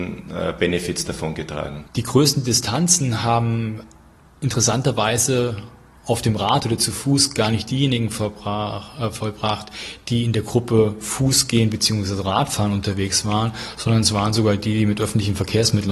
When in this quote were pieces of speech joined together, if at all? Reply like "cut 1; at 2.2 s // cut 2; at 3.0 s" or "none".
cut 1; at 1.9 s